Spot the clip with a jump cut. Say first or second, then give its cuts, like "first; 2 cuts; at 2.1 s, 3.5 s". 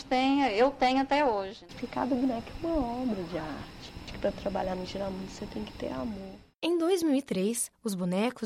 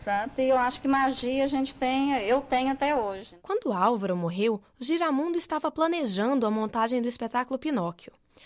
first; 1 cut; at 1.7 s